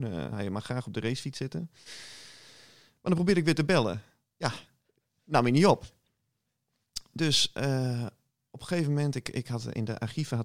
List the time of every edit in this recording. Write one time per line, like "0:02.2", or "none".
none